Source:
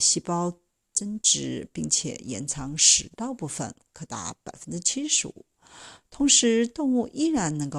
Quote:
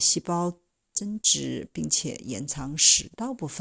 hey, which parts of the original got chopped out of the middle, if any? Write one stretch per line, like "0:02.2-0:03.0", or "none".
none